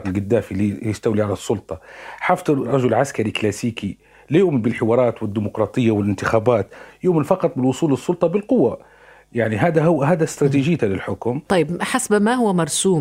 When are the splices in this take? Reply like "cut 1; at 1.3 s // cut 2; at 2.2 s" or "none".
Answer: none